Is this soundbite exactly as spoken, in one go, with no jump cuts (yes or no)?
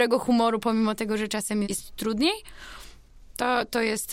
no